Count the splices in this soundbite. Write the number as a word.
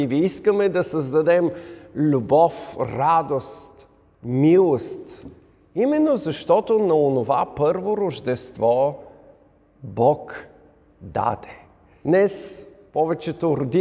one